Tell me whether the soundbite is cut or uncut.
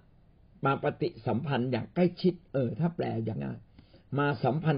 cut